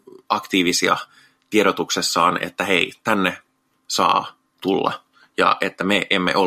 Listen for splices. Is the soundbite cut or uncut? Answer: uncut